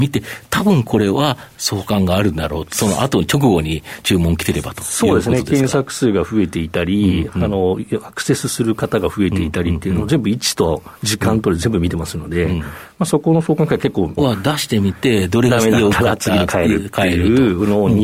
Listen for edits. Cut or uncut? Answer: cut